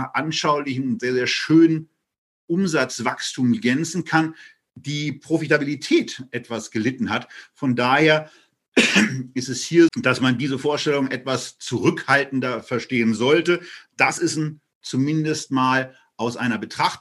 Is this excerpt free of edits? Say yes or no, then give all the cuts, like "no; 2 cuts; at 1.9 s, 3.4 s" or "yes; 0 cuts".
no; 2 cuts; at 4.7 s, 9.9 s